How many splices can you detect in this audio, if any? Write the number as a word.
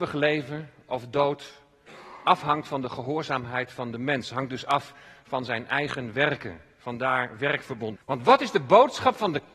one